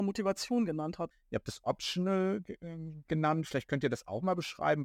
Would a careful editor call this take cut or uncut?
cut